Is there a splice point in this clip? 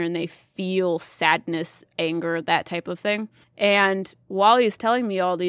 no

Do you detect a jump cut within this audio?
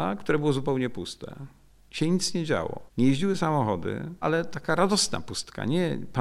yes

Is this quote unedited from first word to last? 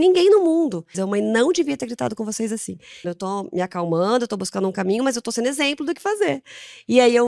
no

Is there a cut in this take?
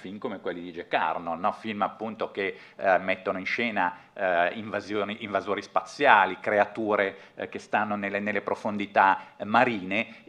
no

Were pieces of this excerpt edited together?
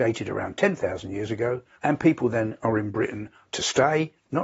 yes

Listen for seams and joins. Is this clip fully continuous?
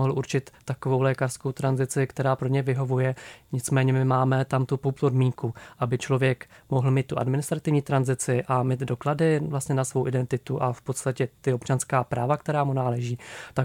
yes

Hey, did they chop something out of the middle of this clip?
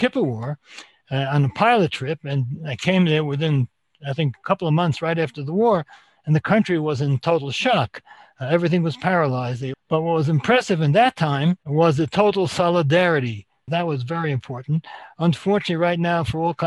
yes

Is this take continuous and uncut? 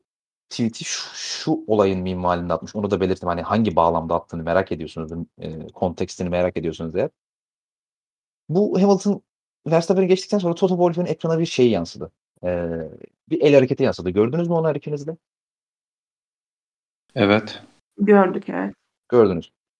yes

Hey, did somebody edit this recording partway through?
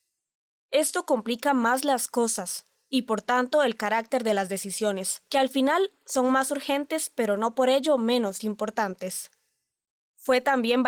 no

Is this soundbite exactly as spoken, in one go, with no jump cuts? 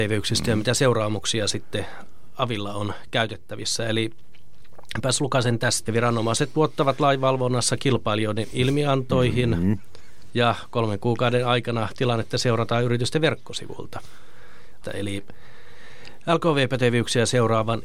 no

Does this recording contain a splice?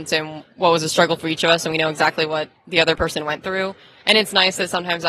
no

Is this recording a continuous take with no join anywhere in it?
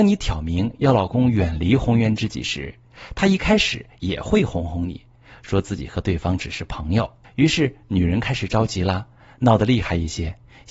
no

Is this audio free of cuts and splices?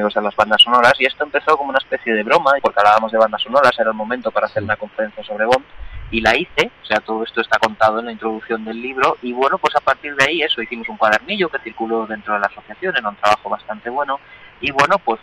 no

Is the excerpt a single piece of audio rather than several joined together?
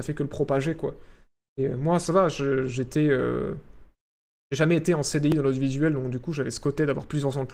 yes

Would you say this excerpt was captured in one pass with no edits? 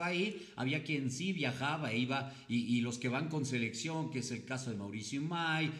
yes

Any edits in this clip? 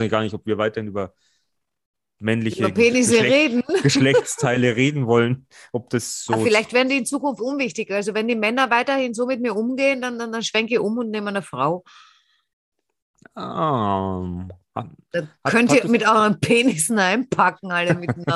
no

